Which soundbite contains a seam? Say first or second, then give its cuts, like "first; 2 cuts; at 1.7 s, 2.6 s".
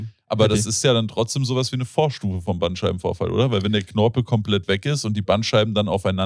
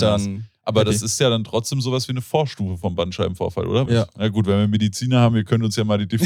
second; 1 cut; at 3.9 s